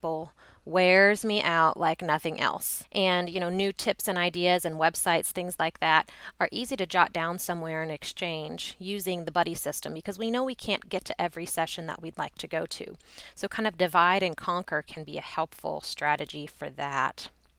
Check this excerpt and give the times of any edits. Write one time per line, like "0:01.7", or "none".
0:02.8

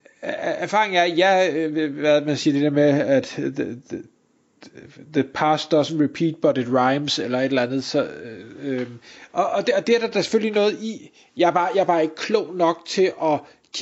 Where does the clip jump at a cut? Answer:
none

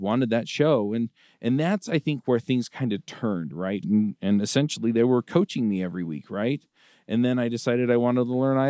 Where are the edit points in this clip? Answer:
0:03.8

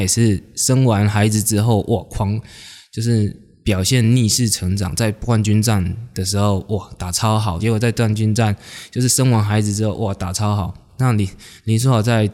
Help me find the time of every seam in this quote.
0:07.6
0:10.9

